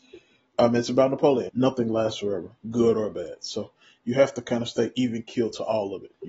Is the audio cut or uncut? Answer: cut